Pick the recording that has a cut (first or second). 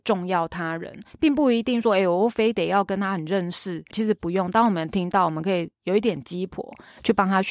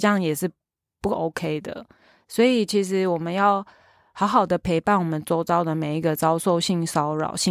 first